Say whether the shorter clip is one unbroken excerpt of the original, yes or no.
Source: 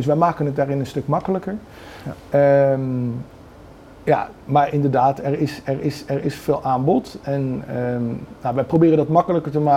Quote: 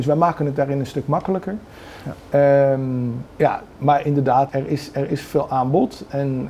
no